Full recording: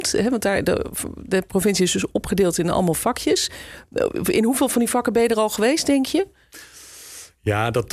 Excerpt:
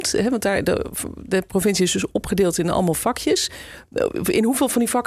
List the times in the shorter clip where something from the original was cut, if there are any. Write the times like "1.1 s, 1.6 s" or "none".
none